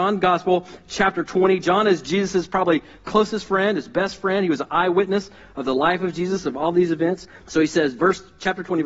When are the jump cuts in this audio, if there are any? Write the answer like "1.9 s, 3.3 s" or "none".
7.4 s